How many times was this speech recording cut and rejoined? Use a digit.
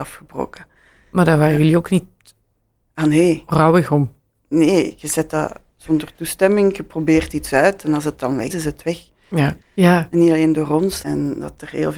3